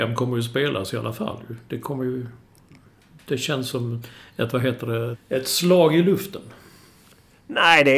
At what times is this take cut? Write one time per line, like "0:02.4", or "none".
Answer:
0:05.1